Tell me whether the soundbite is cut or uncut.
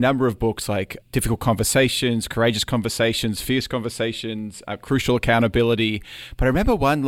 uncut